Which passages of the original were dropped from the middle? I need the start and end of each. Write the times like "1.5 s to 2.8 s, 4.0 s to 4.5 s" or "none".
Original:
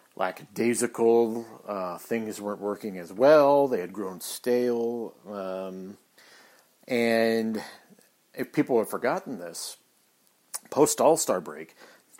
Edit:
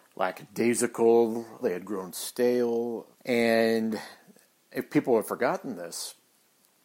1.6 s to 3.7 s, 5.2 s to 6.7 s